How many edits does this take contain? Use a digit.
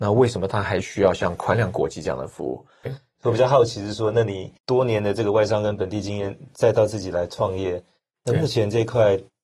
2